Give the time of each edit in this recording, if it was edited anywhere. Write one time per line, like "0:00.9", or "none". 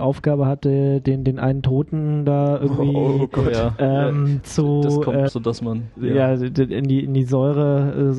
0:05.3